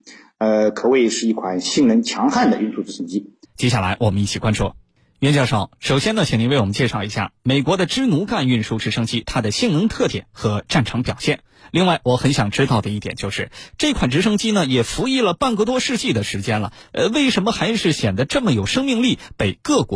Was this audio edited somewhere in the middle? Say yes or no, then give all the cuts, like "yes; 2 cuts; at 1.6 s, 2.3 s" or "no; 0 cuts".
yes; 1 cut; at 3.4 s